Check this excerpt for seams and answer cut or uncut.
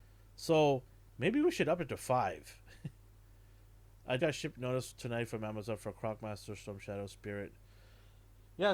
cut